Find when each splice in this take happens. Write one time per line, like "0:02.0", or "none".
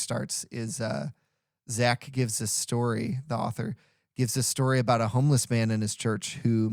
none